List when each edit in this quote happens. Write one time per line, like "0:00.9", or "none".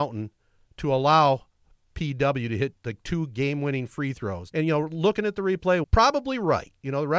0:04.5
0:05.8